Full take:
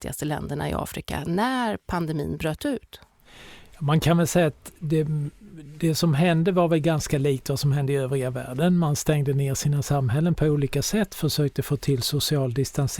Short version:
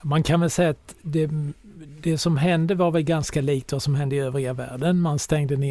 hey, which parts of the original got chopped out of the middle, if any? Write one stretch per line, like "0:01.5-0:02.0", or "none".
none